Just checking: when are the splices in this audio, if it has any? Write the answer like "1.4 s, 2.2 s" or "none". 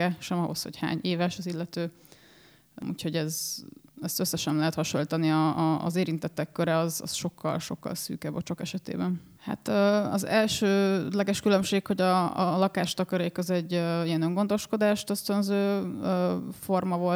9.4 s